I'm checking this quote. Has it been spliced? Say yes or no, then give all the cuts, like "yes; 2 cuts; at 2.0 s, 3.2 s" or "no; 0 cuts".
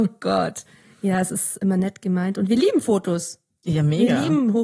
yes; 1 cut; at 1.6 s